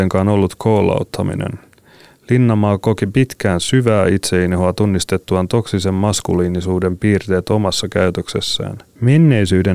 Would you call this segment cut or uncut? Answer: uncut